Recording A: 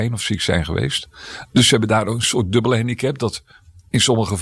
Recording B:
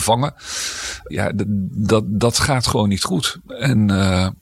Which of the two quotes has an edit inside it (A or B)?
B